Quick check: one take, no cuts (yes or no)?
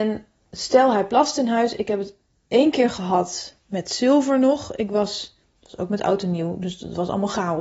yes